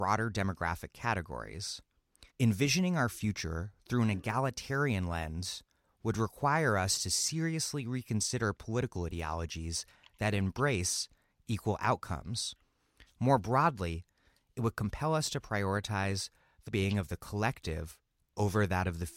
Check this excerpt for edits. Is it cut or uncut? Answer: cut